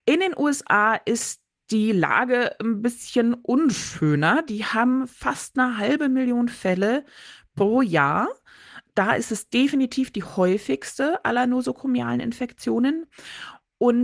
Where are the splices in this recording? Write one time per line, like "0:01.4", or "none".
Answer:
none